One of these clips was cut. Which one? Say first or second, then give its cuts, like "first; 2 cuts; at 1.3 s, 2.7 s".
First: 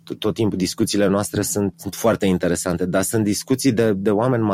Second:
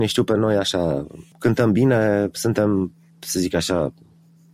first; 1 cut; at 1.7 s